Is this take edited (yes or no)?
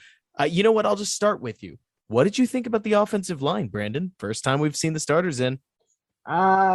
no